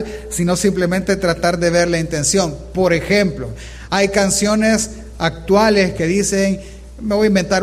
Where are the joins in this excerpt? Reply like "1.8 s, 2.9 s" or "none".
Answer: none